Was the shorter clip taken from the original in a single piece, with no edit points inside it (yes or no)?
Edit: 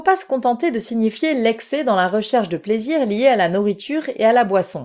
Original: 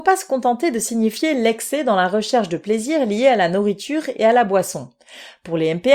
yes